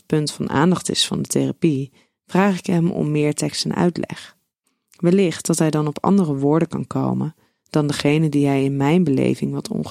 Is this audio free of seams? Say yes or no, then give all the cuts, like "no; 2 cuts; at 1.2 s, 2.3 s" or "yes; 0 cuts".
yes; 0 cuts